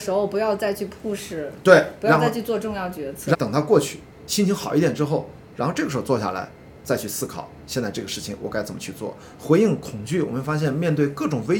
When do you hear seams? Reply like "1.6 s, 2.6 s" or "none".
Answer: 3.3 s